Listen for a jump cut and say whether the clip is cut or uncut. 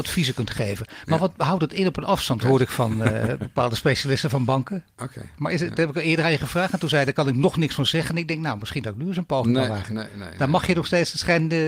cut